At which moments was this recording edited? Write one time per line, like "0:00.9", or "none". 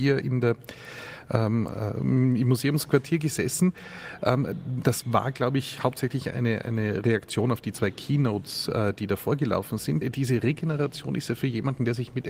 0:10.0